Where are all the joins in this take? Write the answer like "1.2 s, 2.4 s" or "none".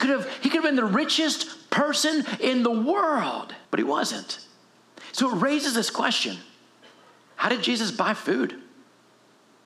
3.6 s